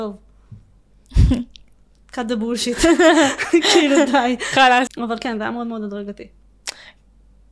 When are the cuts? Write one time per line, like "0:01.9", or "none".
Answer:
0:04.9